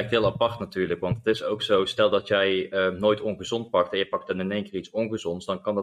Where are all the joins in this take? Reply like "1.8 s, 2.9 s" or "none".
none